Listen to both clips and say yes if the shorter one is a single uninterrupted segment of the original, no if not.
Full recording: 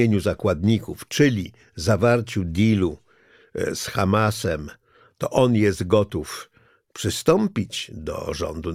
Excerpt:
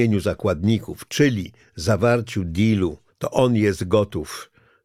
no